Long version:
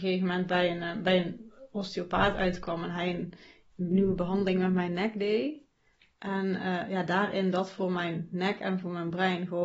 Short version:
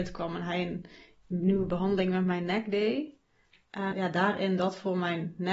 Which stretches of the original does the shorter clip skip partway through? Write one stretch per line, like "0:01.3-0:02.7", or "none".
0:06.4-0:06.9